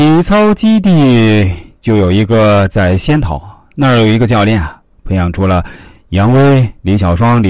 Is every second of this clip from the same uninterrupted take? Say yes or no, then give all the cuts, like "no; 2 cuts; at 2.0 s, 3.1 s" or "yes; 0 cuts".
yes; 0 cuts